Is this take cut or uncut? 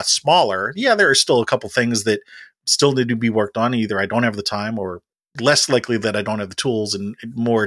uncut